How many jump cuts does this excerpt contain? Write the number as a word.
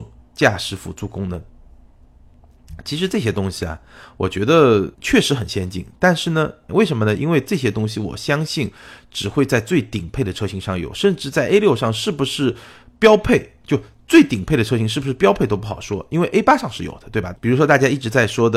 three